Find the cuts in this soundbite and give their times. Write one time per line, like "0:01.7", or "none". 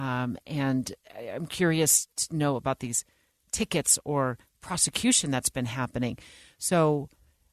none